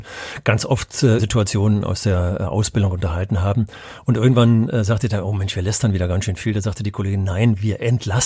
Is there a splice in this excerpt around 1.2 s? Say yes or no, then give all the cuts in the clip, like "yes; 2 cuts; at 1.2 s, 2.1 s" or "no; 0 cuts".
yes; 1 cut; at 1.2 s